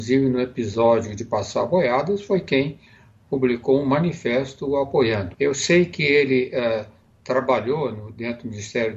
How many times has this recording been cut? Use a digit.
1